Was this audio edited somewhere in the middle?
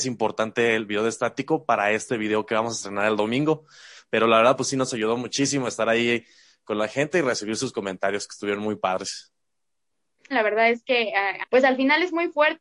yes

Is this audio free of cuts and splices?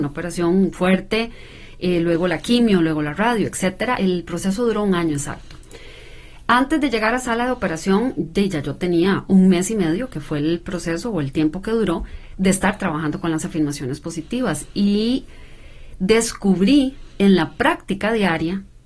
yes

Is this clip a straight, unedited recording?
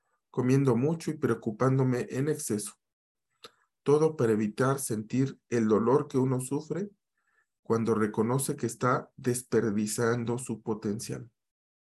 yes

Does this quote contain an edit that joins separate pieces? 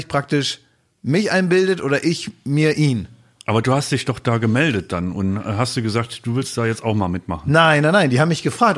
no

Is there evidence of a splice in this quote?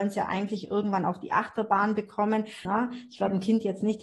yes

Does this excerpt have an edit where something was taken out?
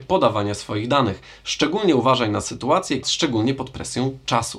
yes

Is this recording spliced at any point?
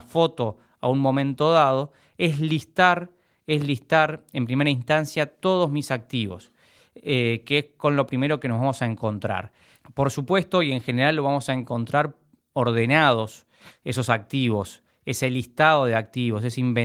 no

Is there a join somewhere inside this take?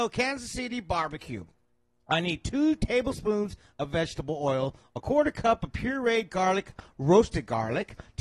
no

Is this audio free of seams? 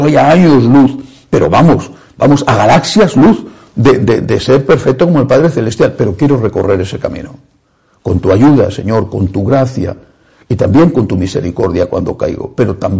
yes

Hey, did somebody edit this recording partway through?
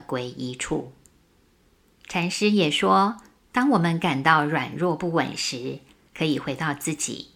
no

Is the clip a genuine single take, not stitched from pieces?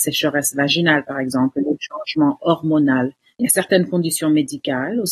no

